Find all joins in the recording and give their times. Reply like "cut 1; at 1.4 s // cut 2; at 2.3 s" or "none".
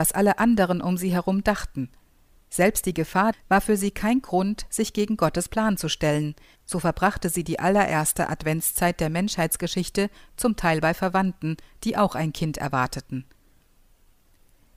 cut 1; at 3.3 s // cut 2; at 6.5 s